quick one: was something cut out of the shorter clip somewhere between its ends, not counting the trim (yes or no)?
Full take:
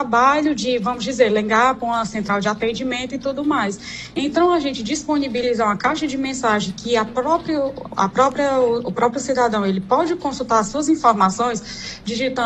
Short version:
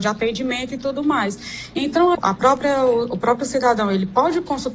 yes